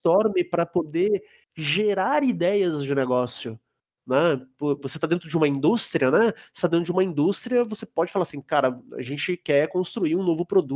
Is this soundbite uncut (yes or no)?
yes